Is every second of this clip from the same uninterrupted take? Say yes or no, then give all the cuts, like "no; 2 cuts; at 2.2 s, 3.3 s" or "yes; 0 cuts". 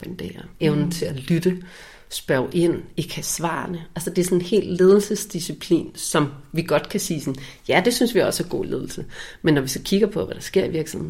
yes; 0 cuts